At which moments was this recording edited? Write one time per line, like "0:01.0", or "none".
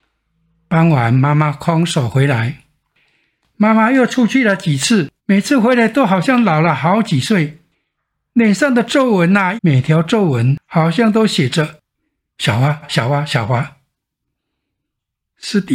0:05.2
0:09.6
0:12.8

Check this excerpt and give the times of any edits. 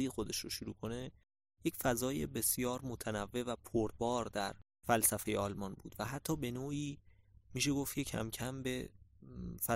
none

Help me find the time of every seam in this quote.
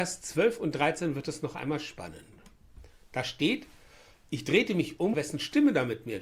0:05.1

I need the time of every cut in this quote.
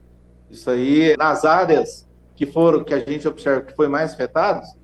0:01.1

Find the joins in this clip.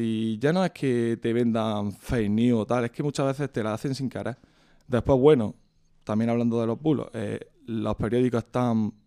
0:04.8

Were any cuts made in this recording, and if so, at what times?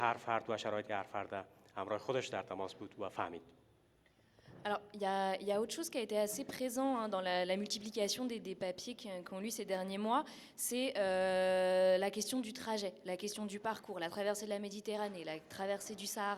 none

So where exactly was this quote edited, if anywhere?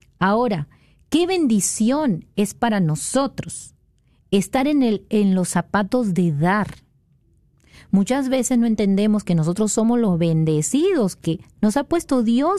none

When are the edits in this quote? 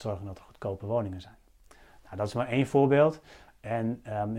none

